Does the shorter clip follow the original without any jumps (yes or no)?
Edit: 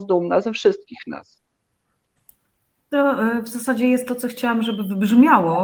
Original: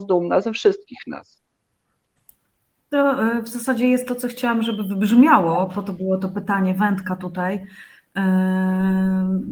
yes